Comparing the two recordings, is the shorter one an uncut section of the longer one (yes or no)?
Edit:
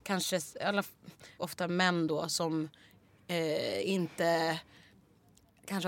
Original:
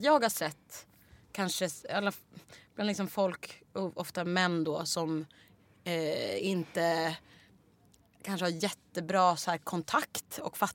no